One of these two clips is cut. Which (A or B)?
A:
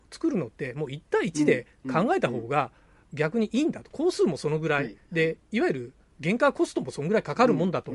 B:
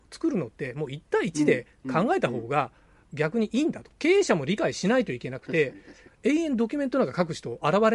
B